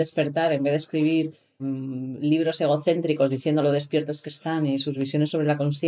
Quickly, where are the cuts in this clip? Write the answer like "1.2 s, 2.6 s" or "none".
1.6 s